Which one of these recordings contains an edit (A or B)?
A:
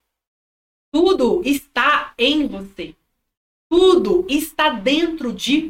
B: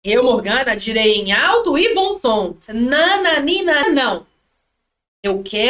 B